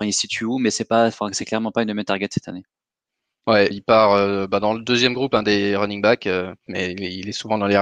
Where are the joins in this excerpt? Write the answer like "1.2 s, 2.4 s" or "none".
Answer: 3.7 s, 6.7 s